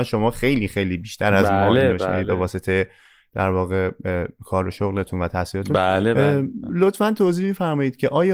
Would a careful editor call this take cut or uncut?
uncut